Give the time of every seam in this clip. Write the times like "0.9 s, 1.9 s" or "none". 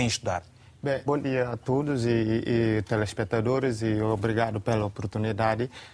1.1 s